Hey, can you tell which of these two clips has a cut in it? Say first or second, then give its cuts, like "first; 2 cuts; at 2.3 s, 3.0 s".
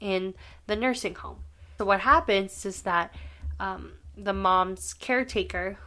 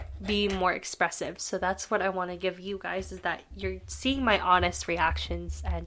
first; 1 cut; at 1.8 s